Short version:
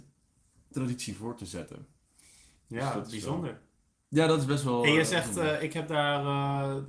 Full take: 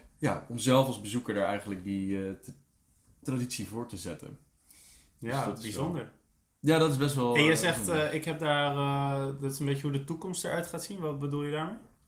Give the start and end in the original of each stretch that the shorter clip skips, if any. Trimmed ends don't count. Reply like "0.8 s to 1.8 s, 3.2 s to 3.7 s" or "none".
none